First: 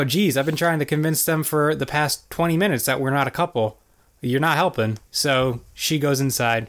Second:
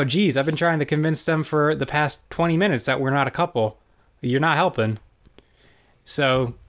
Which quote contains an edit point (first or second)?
first